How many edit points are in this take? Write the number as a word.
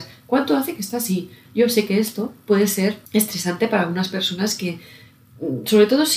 two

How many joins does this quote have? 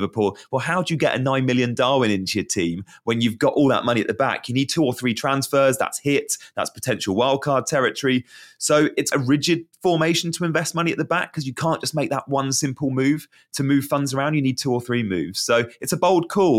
one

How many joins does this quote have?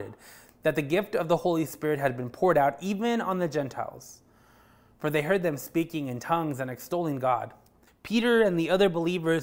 one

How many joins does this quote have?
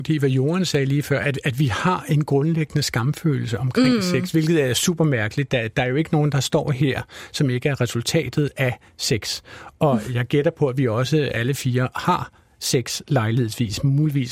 zero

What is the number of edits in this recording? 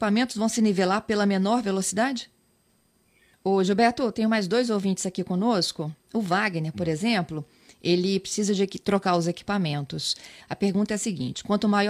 two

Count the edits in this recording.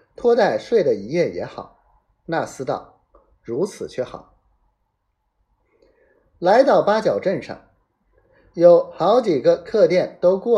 zero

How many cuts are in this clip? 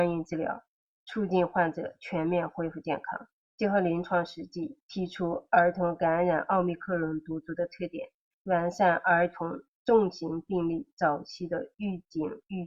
two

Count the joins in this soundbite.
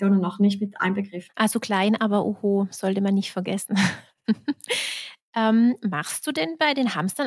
one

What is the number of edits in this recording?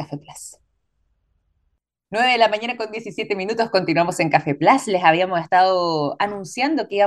zero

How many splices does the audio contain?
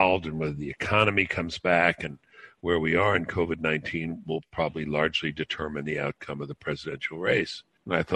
zero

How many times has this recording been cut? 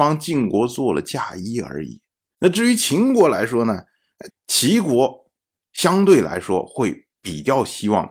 one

